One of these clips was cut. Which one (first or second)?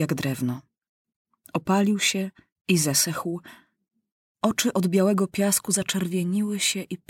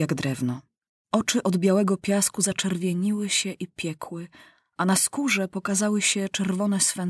second